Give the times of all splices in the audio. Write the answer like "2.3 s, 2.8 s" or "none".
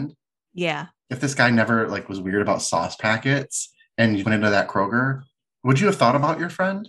4.2 s